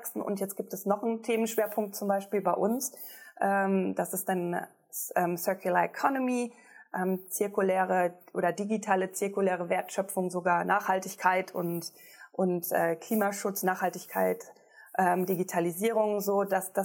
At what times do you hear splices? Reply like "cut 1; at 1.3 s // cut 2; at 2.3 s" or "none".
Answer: none